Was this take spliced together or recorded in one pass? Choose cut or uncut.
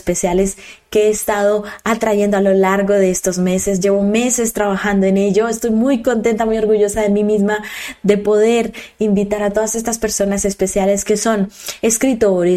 uncut